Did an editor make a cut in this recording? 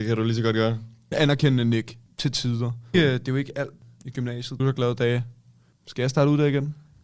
yes; 3 cuts; at 1.1 s, 2.9 s, 4.6 s

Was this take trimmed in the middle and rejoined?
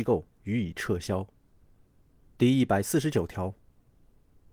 yes; 1 cut; at 2.3 s

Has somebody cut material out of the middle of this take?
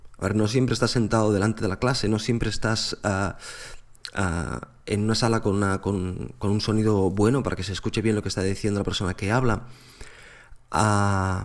no; 0 cuts

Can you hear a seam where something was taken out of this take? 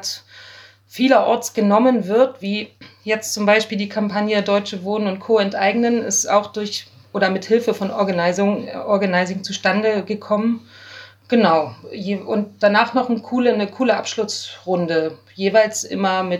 no; 0 cuts

